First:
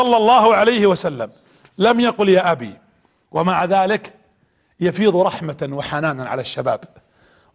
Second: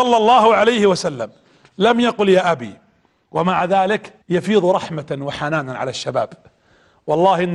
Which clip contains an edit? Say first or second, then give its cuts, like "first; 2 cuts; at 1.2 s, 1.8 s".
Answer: second; 1 cut; at 4.2 s